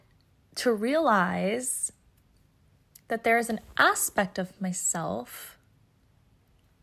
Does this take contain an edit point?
no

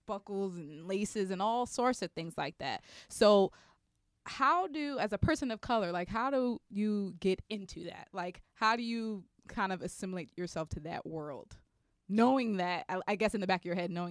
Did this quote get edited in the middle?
no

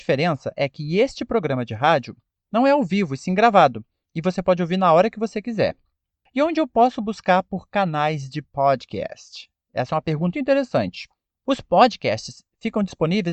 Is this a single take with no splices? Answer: no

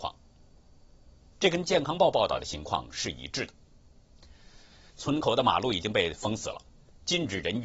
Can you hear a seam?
yes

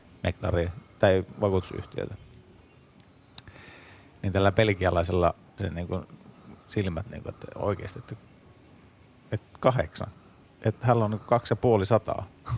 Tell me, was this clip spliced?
no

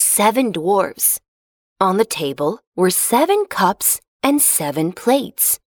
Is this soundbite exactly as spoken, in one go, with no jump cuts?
no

